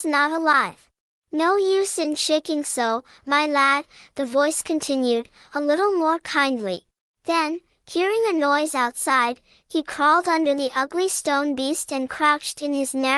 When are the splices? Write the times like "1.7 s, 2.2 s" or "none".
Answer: 1.2 s, 7.1 s